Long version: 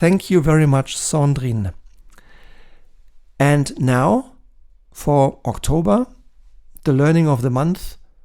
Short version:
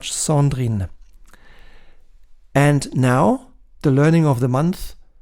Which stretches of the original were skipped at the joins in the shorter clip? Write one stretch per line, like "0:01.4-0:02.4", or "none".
0:04.7-0:06.8